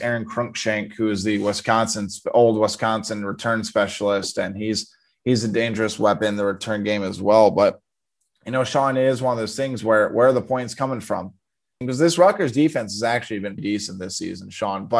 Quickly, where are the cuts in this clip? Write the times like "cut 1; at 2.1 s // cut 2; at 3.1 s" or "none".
cut 1; at 11.8 s // cut 2; at 13.6 s